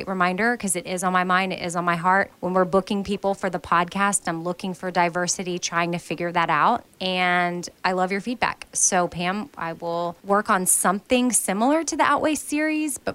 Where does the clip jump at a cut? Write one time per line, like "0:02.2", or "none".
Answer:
none